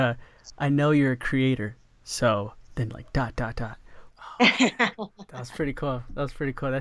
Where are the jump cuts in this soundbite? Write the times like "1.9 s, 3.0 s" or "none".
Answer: 4.1 s